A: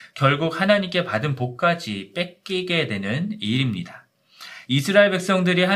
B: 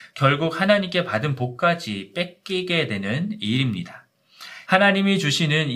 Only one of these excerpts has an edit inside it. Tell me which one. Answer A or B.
B